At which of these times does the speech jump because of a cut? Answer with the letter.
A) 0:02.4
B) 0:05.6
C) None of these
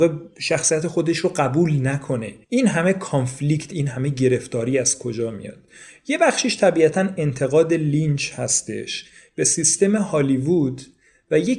A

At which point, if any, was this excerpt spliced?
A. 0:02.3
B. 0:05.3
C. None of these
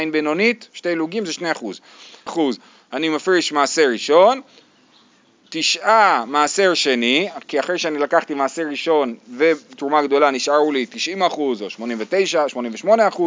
A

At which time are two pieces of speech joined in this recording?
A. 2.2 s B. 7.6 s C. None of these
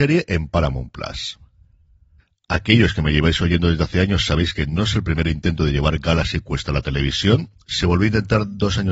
B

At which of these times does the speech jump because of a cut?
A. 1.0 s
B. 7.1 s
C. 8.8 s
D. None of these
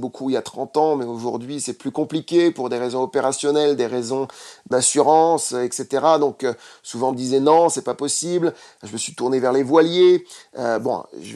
D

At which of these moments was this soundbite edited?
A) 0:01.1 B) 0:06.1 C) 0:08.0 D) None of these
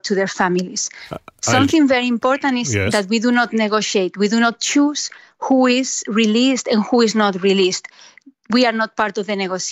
B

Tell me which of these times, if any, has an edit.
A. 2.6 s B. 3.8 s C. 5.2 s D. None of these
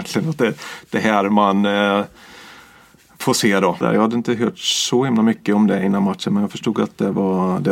B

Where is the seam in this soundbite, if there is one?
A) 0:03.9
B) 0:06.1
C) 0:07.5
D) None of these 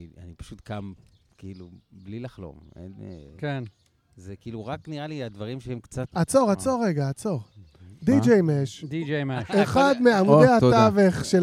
B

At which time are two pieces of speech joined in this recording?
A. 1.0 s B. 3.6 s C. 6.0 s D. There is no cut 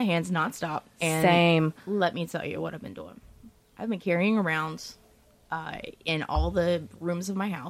D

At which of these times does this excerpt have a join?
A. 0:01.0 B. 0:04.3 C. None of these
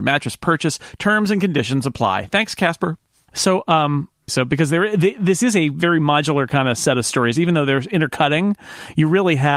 B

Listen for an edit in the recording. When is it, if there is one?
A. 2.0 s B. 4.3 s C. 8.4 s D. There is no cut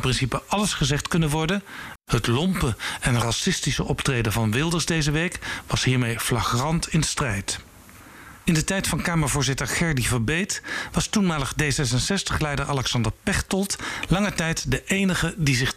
A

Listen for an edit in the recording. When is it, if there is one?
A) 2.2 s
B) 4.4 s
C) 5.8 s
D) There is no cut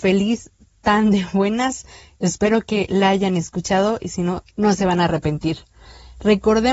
B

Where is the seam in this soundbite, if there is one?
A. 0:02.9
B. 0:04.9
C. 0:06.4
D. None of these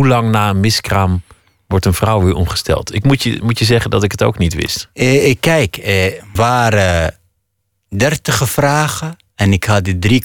C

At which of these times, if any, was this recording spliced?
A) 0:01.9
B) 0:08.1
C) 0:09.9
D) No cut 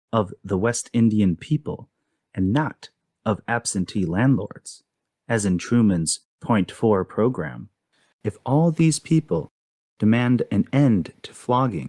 B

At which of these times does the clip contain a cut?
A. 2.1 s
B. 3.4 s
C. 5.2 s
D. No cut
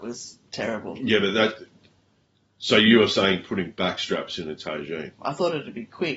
C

